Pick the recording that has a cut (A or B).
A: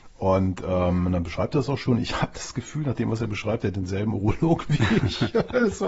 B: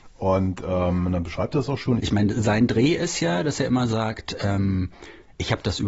B